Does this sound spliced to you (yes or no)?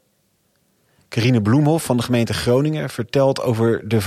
no